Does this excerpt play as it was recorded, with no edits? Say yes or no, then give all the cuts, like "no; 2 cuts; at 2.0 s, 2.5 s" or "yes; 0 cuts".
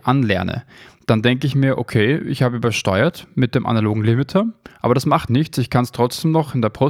no; 1 cut; at 5.3 s